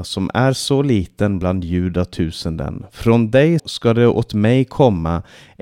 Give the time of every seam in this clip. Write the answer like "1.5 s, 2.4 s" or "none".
3.6 s